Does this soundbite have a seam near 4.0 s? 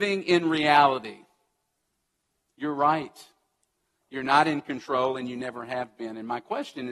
no; 0 cuts

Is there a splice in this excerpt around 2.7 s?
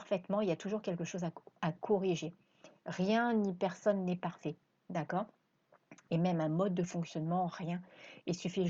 no; 0 cuts

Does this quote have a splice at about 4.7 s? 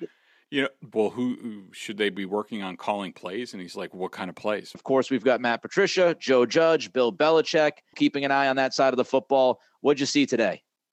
yes; 3 cuts; at 0.9 s, 4.7 s, 7.9 s

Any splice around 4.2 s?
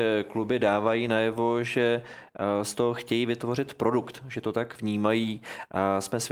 no; 0 cuts

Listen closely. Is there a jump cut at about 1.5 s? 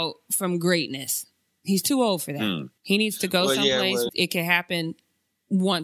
no; 2 cuts; at 2.8 s, 4.1 s

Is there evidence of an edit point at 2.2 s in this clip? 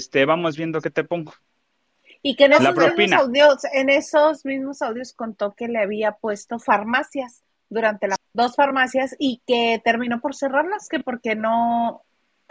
no; 1 cut; at 8.2 s

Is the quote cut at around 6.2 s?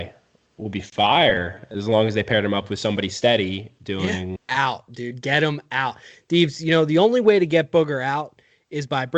no; 1 cut; at 4.4 s

